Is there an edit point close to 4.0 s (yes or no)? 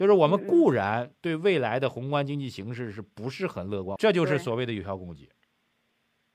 yes